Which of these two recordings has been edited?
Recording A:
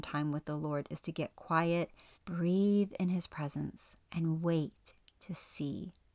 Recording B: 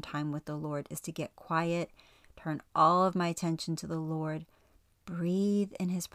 A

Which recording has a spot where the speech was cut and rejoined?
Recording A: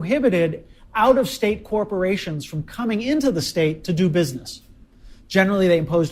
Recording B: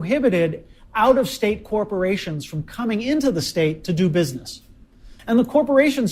B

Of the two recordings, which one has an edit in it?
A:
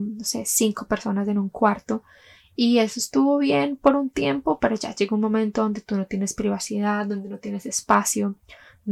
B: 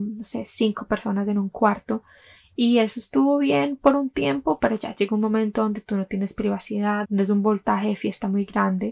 B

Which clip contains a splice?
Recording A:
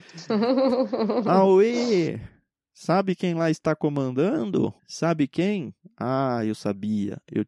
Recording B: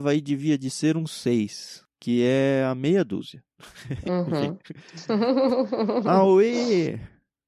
A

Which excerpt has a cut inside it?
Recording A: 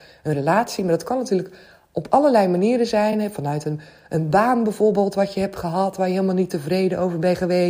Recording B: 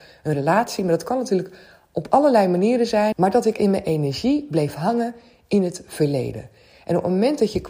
B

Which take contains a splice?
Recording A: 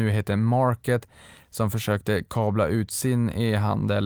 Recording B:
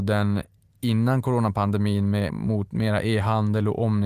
B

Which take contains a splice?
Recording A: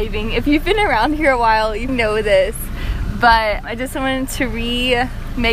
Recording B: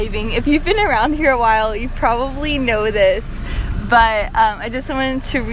A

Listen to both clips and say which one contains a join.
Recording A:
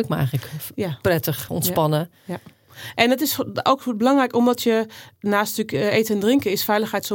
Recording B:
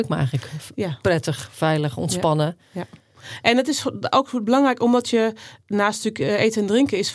A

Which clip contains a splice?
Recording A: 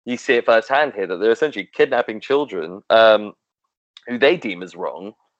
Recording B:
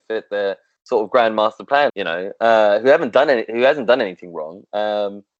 B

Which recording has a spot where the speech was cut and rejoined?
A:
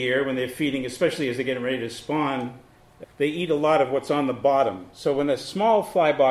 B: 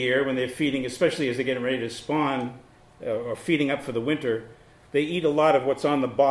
A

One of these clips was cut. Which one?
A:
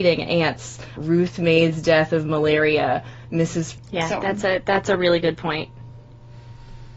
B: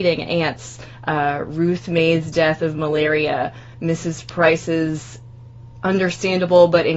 A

